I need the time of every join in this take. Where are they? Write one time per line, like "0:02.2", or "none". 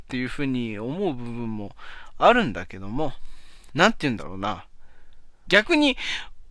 0:03.7
0:05.4